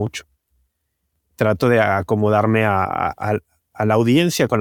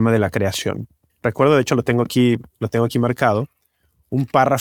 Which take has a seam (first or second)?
second